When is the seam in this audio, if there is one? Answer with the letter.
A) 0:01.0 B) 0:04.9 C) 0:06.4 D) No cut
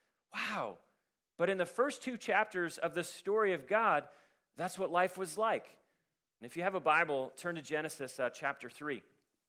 C